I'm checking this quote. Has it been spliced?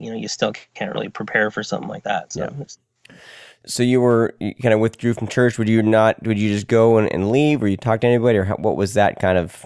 no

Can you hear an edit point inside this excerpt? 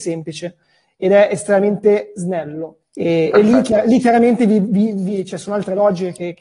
yes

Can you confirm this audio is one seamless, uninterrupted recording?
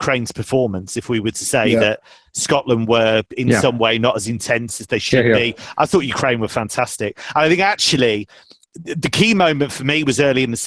yes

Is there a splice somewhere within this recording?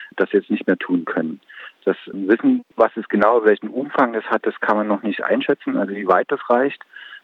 no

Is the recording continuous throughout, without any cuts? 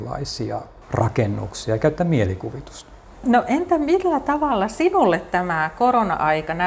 yes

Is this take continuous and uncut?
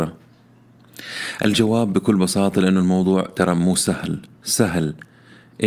yes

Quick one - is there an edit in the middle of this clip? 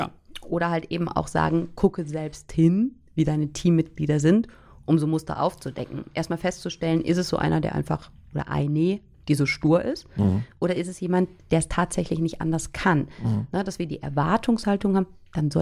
no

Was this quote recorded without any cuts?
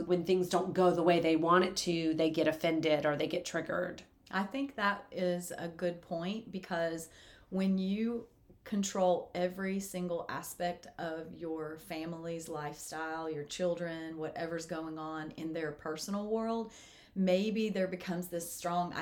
yes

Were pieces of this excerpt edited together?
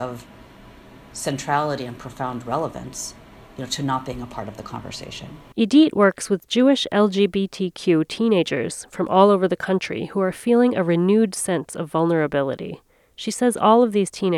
no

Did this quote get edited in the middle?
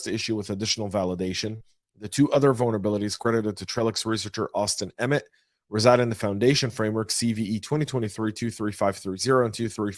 no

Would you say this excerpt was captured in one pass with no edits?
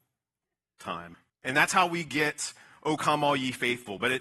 no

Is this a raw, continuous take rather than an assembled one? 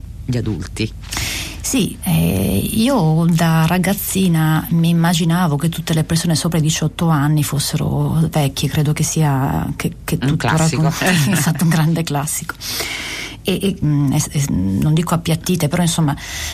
no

